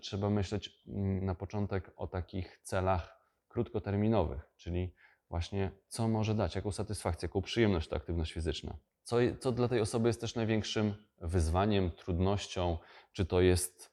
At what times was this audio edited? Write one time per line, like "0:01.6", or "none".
0:08.9